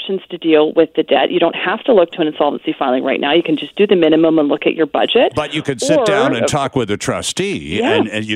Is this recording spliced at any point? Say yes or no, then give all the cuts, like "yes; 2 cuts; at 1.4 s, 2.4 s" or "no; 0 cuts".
no; 0 cuts